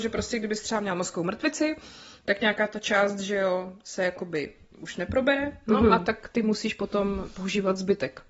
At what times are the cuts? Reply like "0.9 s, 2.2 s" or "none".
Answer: none